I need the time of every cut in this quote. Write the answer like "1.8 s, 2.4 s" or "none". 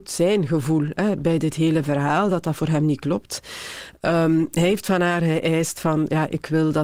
1.2 s